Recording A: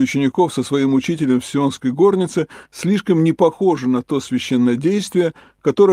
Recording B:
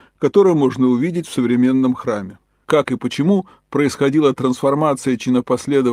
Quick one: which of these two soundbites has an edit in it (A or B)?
B